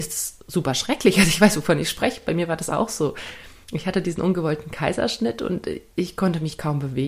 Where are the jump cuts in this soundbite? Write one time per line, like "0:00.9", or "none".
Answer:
none